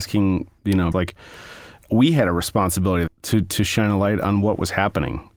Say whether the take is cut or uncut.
cut